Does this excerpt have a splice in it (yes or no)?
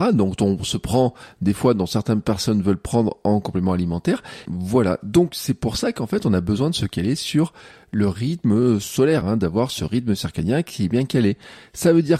yes